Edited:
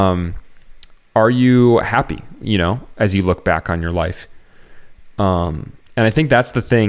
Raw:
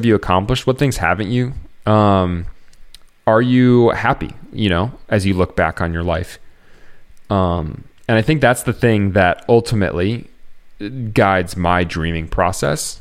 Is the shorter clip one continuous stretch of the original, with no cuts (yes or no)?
yes